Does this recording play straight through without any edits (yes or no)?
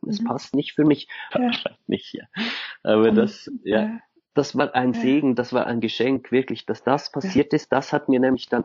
no